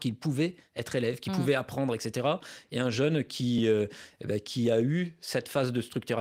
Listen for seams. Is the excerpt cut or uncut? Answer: uncut